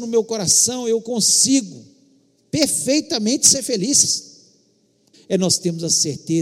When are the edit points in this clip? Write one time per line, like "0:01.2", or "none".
0:05.1